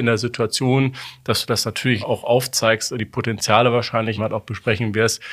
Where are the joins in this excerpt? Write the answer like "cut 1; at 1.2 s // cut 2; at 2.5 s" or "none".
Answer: cut 1; at 2.0 s // cut 2; at 4.2 s